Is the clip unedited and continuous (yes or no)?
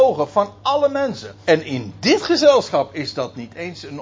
no